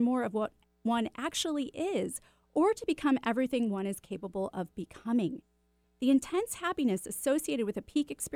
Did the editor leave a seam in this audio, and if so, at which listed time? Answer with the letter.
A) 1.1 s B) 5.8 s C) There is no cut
B